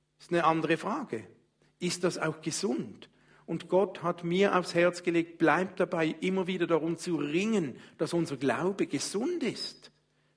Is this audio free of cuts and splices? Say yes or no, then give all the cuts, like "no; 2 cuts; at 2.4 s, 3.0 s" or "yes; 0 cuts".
yes; 0 cuts